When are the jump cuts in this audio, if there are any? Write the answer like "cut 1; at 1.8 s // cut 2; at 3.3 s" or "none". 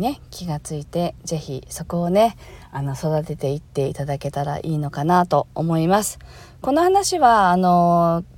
none